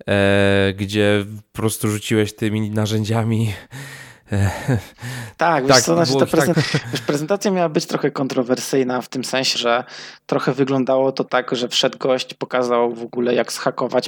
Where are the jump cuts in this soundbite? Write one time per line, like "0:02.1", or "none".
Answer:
0:06.5
0:09.5